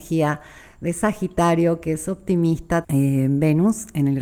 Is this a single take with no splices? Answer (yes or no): no